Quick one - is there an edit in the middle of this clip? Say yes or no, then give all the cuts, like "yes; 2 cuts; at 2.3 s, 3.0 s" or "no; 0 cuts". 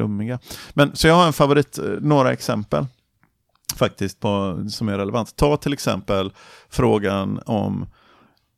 no; 0 cuts